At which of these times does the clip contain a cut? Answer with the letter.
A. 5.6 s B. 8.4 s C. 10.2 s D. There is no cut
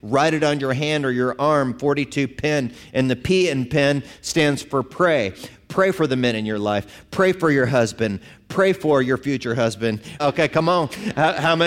C